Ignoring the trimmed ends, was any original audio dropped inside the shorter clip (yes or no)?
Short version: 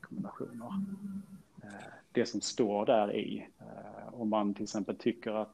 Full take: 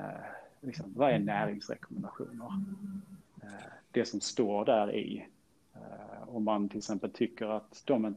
yes